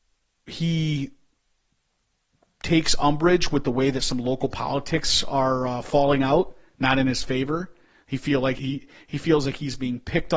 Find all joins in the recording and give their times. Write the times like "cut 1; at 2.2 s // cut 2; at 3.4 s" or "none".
cut 1; at 8.6 s